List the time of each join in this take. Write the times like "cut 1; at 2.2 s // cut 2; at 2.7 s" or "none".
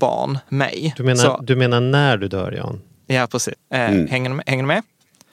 cut 1; at 3.5 s

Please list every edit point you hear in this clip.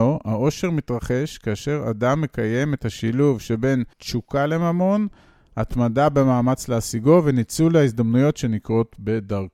cut 1; at 3.9 s

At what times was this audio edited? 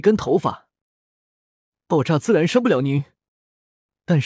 none

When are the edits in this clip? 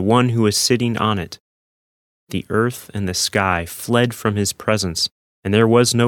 none

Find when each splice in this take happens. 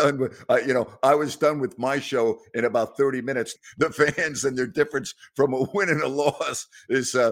cut 1; at 3.5 s

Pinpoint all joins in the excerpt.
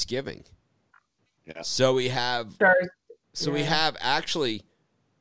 none

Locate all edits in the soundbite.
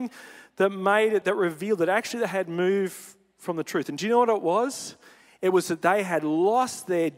cut 1; at 1.2 s

